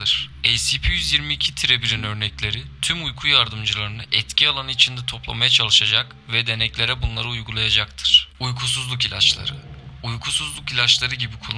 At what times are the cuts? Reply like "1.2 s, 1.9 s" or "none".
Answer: 8.3 s